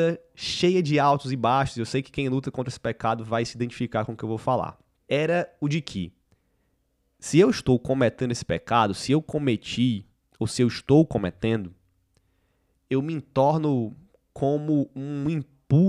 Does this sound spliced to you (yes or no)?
yes